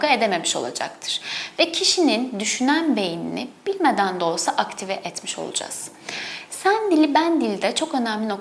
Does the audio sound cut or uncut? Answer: uncut